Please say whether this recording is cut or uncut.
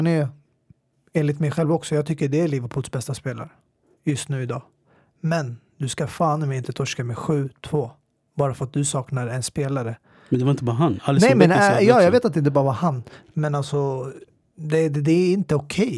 uncut